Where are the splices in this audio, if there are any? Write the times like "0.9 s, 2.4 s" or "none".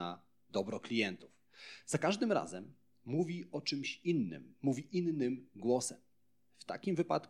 none